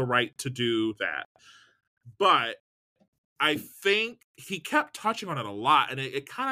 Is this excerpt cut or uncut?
uncut